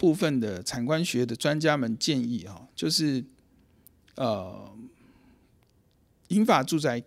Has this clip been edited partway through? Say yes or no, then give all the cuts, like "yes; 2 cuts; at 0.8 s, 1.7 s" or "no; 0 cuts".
no; 0 cuts